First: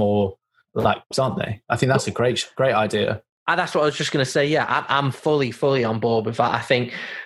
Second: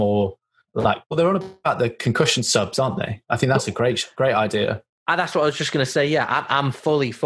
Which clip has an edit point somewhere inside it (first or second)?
first